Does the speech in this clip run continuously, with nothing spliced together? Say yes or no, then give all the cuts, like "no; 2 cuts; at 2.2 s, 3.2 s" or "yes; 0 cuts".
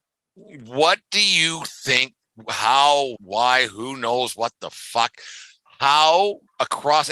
no; 1 cut; at 3.2 s